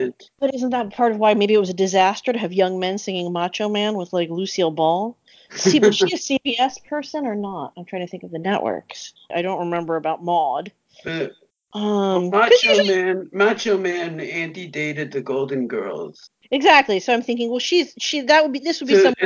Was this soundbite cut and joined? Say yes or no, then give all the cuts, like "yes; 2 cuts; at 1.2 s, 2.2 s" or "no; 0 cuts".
yes; 1 cut; at 9.3 s